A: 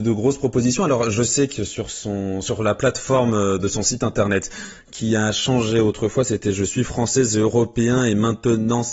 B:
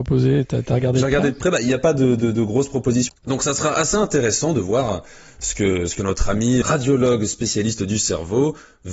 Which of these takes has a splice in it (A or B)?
B